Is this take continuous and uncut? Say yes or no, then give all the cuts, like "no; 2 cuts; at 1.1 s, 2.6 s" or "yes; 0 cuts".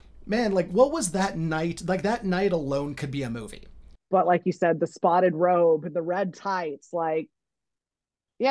no; 1 cut; at 4.0 s